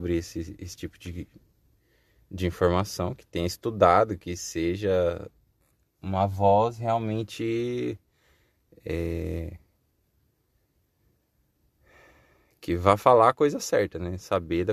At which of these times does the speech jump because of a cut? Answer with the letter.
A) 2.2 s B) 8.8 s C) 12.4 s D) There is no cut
D